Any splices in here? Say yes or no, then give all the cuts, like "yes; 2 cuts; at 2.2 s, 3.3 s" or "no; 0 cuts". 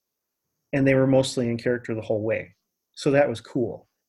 no; 0 cuts